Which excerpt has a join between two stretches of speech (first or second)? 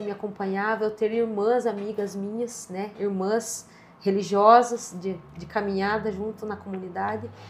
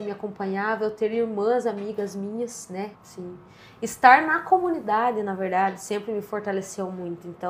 second